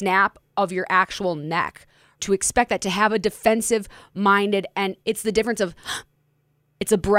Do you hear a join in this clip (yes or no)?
yes